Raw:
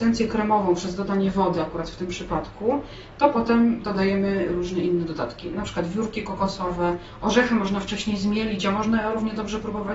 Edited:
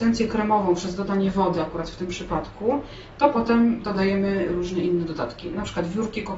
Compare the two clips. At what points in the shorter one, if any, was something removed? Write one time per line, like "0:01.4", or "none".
none